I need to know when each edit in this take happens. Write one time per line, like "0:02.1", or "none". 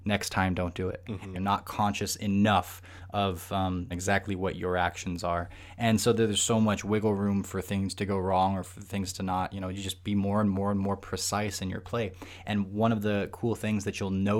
0:01.3
0:03.9